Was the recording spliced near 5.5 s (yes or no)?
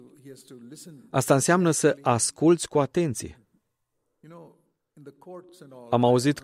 no